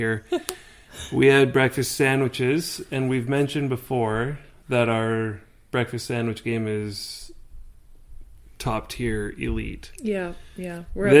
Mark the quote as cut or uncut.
uncut